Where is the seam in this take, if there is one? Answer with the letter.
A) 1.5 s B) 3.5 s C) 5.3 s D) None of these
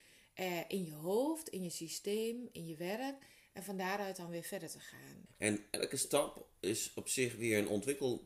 C